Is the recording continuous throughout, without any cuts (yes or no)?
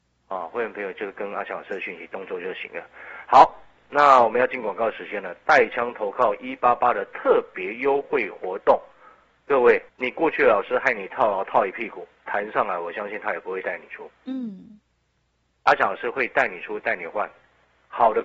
no